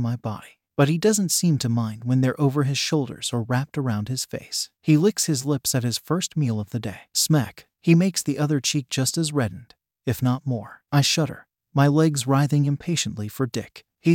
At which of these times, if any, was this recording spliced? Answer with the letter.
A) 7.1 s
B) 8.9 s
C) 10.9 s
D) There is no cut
A